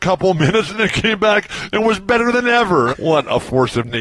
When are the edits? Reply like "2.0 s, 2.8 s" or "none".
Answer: 2.9 s

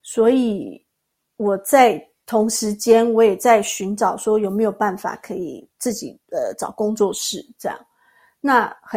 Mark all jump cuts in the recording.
6.2 s

